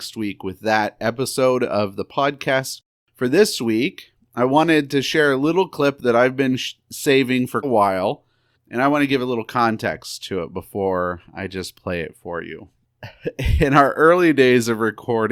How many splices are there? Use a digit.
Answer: 1